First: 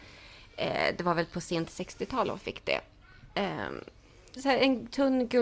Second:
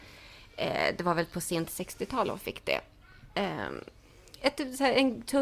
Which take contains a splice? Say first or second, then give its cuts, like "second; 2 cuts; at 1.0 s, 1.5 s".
first; 1 cut; at 4.4 s